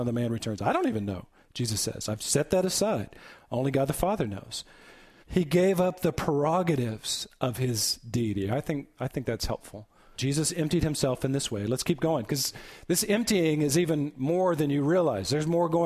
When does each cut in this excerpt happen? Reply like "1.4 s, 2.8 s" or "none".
5.2 s, 10.2 s